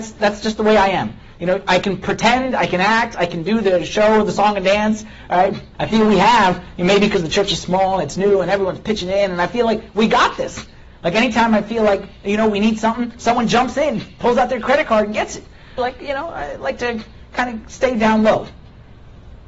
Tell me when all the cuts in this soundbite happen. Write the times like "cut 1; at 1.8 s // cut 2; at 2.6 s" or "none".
cut 1; at 5.7 s // cut 2; at 15.8 s